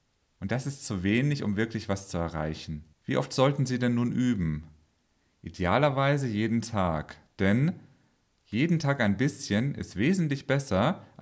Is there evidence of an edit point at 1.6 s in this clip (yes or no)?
no